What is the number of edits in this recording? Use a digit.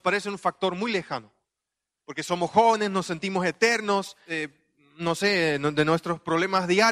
2